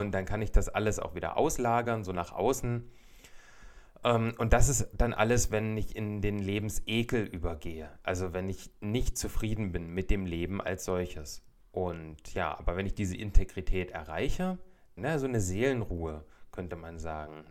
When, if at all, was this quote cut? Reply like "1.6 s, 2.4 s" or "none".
11.6 s, 15.0 s